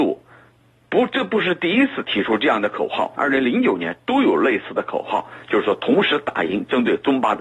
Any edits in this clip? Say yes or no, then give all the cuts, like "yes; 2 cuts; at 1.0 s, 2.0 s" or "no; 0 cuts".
yes; 1 cut; at 3.2 s